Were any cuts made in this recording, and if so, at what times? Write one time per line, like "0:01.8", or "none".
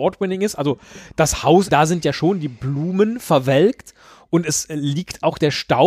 0:01.7